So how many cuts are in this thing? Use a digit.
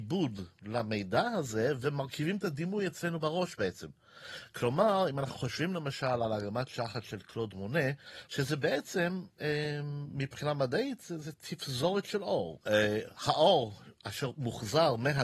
1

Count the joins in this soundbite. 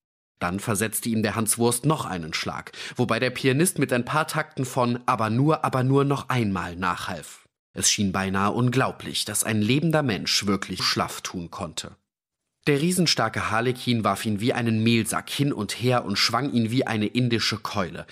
2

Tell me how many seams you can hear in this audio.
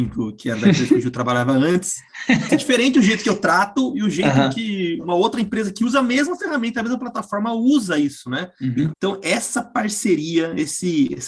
2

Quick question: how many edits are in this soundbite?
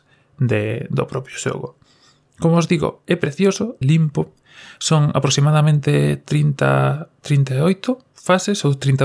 1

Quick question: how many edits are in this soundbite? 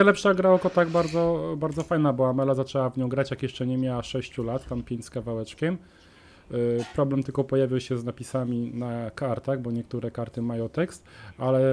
0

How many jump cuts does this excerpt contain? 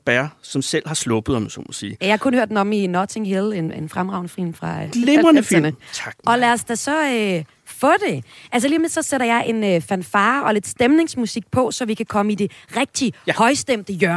1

